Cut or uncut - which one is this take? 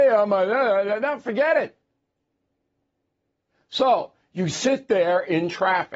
uncut